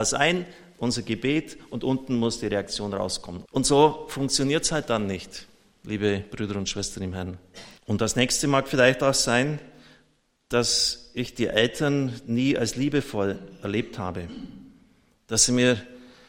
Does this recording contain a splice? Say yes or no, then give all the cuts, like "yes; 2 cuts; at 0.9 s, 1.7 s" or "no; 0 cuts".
yes; 2 cuts; at 3.4 s, 7.8 s